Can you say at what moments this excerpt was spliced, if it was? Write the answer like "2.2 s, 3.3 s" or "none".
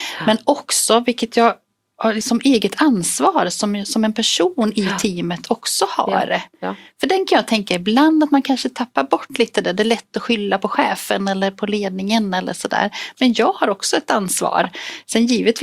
2.2 s